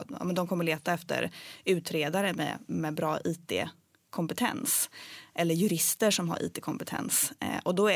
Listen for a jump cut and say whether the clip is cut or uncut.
uncut